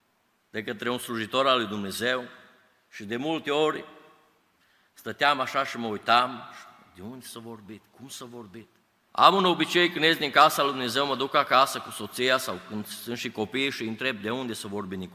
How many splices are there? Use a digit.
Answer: 1